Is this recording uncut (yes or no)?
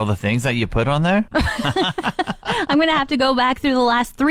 no